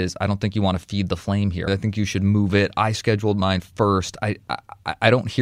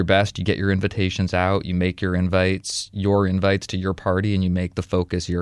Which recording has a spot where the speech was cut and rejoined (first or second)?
first